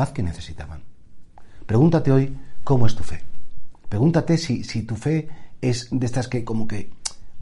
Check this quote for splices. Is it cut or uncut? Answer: uncut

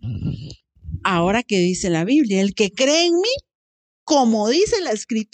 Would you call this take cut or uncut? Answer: uncut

